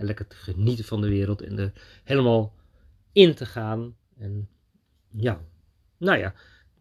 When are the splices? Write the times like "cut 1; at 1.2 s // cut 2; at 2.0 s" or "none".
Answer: none